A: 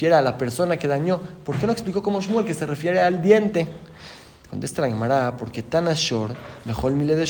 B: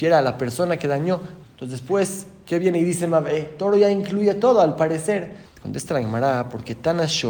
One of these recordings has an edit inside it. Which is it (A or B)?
B